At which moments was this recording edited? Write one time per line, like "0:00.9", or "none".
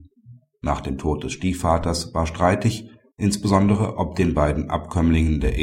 0:03.1